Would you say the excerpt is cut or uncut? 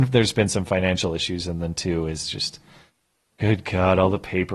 uncut